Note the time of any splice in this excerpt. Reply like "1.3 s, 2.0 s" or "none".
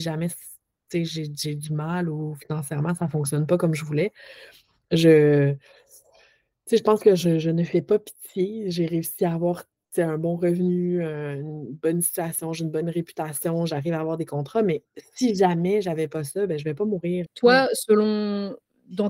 17.3 s